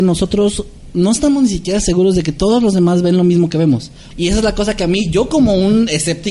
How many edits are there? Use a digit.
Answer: 1